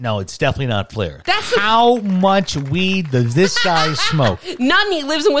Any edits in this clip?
yes; 1 cut; at 1.2 s

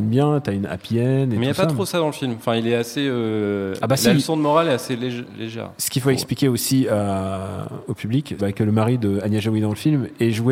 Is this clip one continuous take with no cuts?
no; 1 cut; at 8.4 s

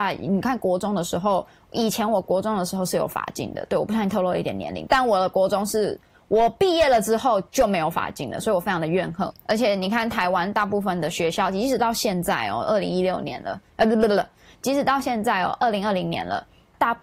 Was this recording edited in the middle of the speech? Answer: no; 0 cuts

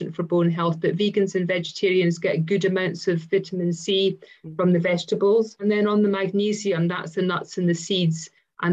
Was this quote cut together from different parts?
no; 0 cuts

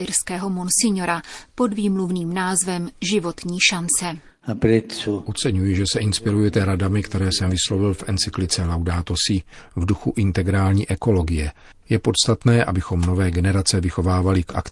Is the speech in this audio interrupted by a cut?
yes; 1 cut; at 11.7 s

